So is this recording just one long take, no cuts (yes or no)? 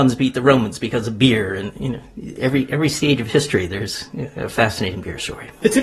yes